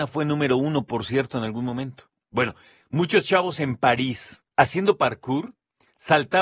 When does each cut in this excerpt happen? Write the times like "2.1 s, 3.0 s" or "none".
2.8 s, 4.5 s